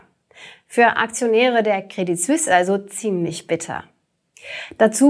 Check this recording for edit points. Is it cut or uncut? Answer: uncut